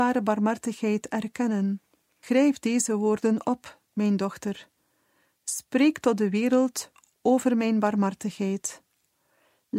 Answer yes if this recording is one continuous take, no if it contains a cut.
no